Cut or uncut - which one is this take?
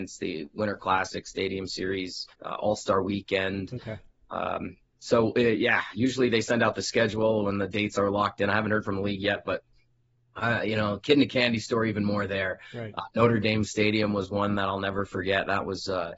cut